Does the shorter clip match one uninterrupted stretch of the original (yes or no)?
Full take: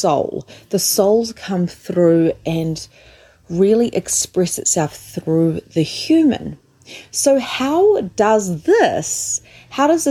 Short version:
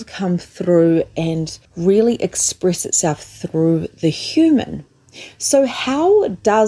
no